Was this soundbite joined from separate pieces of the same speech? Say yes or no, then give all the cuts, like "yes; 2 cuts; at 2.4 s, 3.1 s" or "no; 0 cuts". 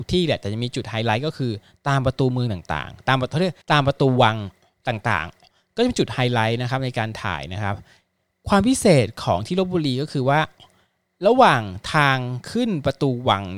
yes; 1 cut; at 3.6 s